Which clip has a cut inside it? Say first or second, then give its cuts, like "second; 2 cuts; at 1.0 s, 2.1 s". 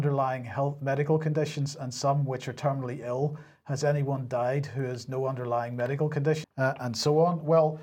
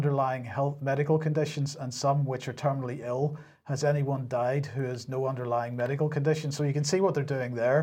first; 1 cut; at 6.4 s